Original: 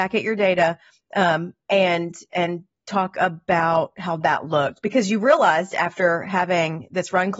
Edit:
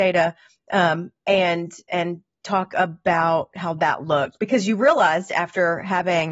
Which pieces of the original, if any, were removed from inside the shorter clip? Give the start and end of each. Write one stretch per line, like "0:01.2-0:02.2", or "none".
none